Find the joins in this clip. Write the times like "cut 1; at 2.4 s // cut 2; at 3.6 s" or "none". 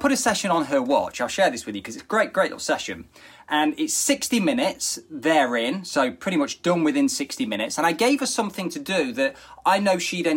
none